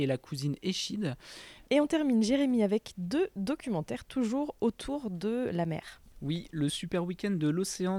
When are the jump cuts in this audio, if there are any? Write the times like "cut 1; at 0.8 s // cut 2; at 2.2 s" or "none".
cut 1; at 1.6 s